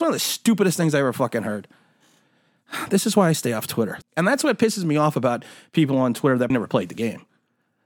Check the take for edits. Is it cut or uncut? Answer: cut